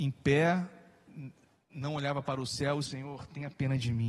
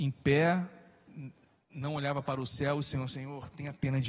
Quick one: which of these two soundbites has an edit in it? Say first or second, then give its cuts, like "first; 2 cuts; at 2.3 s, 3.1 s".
first; 1 cut; at 2.9 s